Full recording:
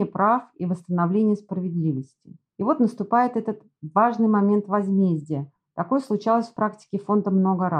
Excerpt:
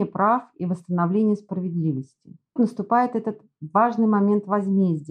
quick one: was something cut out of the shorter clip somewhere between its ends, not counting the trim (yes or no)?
yes